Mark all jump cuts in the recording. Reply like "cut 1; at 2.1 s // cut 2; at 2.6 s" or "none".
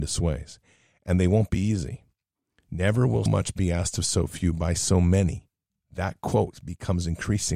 cut 1; at 3.3 s